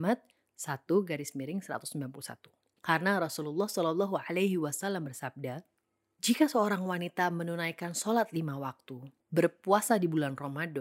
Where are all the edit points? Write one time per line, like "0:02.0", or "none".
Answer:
0:02.8
0:09.2